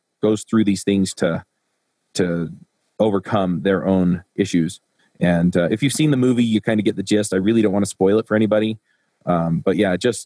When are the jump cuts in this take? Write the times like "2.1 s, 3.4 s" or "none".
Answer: none